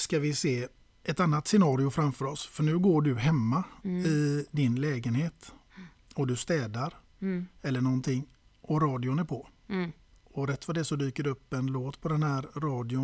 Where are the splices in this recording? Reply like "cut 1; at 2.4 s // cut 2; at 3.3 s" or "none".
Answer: none